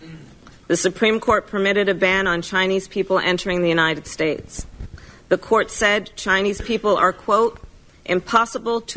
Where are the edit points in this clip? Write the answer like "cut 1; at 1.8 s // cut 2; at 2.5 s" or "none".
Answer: none